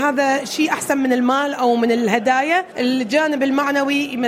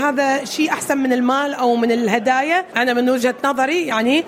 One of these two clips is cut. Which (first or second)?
second